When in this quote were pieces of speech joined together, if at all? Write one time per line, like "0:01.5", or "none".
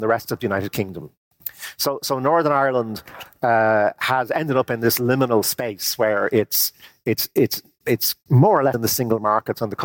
0:07.3
0:08.7